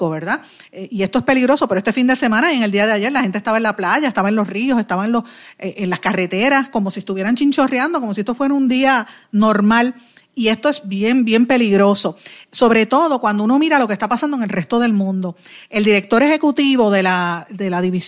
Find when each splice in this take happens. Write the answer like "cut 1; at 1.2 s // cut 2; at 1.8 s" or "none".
none